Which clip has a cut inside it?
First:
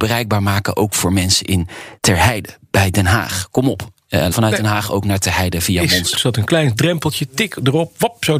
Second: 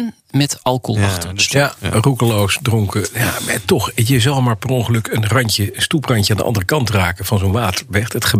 first; 3 cuts; at 2.0 s, 4.3 s, 6.1 s

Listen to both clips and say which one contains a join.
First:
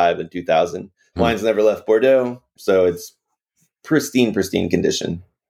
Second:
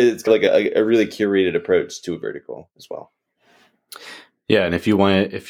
first; 2 cuts; at 1.1 s, 2.6 s

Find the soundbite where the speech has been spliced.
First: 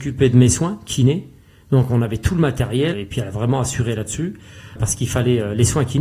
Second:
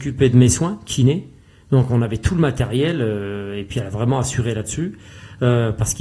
first; 2 cuts; at 2.9 s, 4.8 s

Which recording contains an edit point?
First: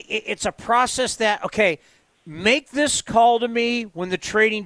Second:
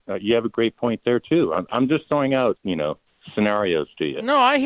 second; 1 cut; at 2.6 s

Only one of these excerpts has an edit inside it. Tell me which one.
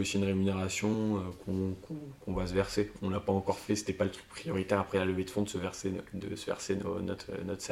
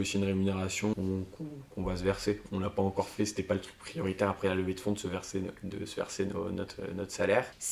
second; 1 cut; at 0.9 s

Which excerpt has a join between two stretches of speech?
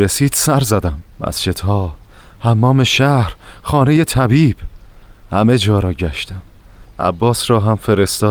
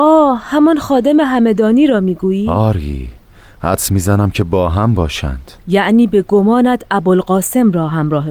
first; 1 cut; at 1.1 s

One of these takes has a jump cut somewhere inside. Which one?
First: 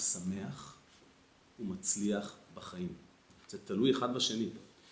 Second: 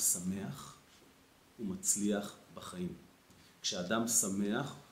first; 1 cut; at 3.4 s

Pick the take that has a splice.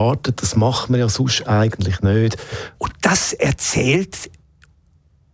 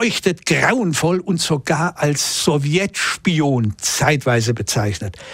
first; 1 cut; at 2.8 s

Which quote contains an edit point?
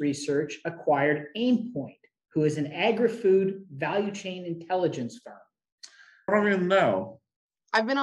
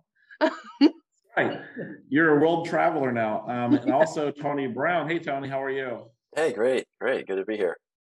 first; 1 cut; at 6.3 s

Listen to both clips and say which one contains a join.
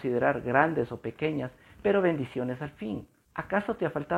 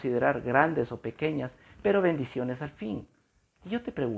first; 1 cut; at 3.2 s

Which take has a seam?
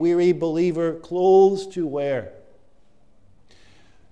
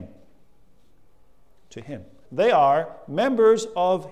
second; 1 cut; at 2.2 s

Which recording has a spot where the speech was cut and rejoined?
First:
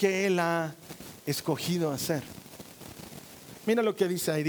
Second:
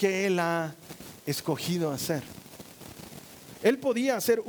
first; 1 cut; at 3.6 s

